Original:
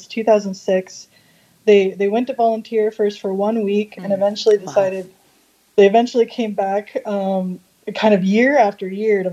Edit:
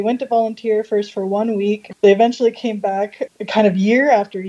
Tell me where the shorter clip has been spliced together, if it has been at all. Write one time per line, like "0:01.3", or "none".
0:01.9
0:03.3